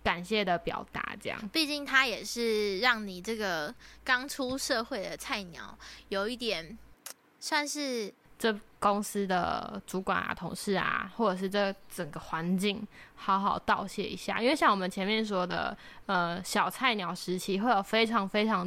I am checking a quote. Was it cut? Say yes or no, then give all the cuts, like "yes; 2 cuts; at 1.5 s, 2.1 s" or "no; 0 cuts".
yes; 1 cut; at 8.3 s